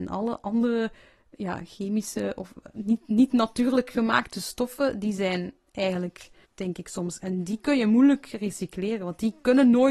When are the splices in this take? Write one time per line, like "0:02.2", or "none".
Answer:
0:06.5